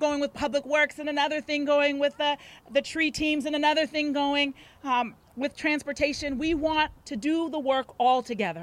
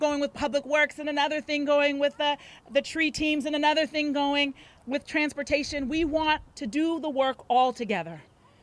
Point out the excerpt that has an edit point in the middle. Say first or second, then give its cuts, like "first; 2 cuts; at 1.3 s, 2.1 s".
second; 1 cut; at 4.8 s